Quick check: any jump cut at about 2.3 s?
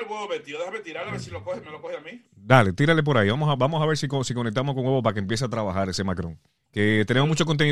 no; 0 cuts

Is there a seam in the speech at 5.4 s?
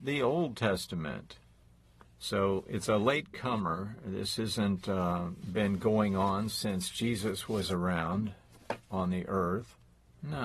yes; 2 cuts; at 2.0 s, 5.4 s

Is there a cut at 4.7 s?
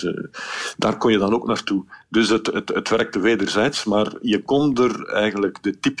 no; 0 cuts

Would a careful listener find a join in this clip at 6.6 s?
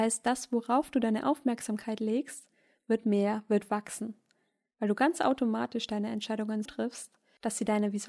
yes; 1 cut; at 6.6 s

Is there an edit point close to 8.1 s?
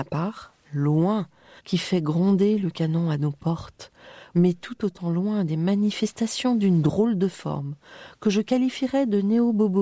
no; 2 cuts; at 1.6 s, 4.3 s

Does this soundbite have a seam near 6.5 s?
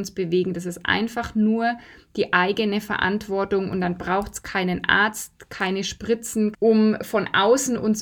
yes; 1 cut; at 6.5 s

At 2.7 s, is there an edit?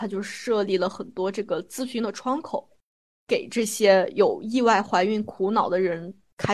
no; 0 cuts

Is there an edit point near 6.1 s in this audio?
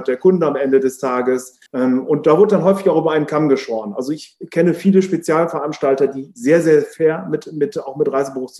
no; 1 cut; at 1.7 s

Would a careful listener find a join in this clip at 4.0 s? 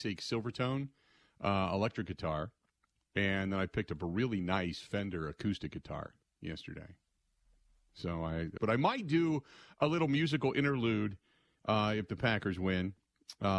no; 1 cut; at 8.6 s

